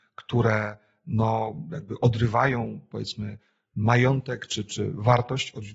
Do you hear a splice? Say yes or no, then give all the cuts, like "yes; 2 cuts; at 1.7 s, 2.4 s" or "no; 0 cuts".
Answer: yes; 1 cut; at 4.7 s